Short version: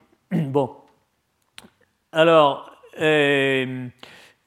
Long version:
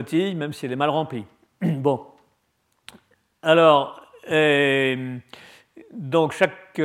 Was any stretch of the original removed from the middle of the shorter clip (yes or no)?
no